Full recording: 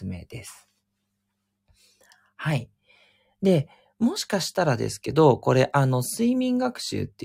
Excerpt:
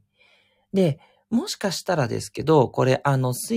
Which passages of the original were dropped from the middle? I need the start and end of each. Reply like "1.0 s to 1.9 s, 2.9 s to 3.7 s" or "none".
none